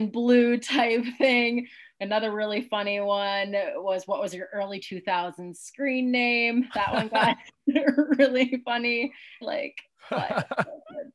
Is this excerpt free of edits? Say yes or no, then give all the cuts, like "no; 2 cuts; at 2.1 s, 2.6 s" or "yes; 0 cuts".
no; 1 cut; at 9.4 s